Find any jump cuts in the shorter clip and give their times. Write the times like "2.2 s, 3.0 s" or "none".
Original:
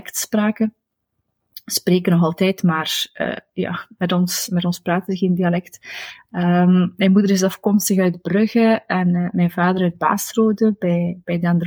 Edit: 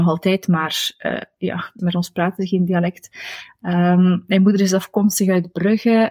1.8 s